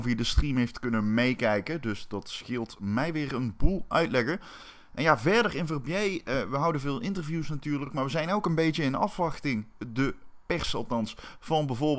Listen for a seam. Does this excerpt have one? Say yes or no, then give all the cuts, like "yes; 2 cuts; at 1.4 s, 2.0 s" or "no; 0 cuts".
no; 0 cuts